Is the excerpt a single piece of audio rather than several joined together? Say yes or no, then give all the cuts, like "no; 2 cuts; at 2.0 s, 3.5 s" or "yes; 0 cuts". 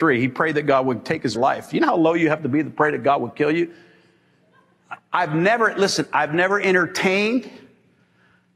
no; 1 cut; at 1.3 s